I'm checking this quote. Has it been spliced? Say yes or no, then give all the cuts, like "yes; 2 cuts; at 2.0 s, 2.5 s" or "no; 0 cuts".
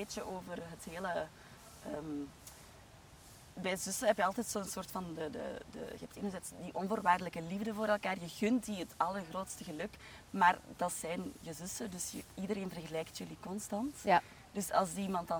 no; 0 cuts